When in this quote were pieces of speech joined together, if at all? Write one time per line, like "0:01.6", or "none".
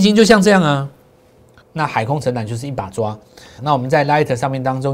0:01.6
0:03.6

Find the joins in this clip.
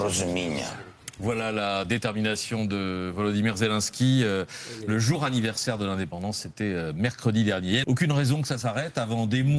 0:07.8

